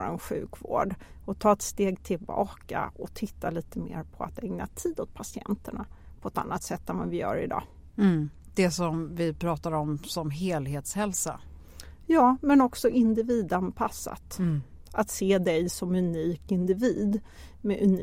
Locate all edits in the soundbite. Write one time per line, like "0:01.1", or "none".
none